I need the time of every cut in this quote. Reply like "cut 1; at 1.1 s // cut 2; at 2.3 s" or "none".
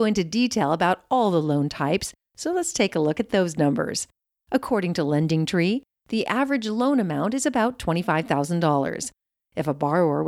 cut 1; at 2.2 s